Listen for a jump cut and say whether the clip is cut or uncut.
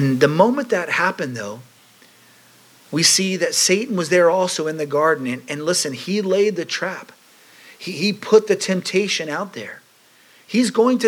uncut